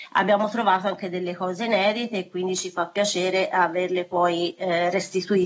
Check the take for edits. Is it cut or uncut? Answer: uncut